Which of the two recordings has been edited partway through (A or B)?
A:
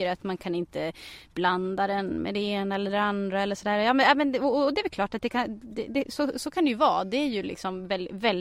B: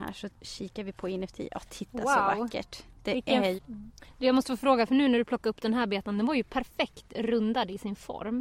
B